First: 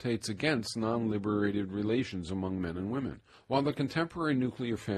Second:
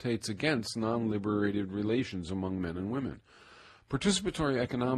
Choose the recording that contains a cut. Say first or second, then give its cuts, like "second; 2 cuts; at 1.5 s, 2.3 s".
first; 1 cut; at 3.3 s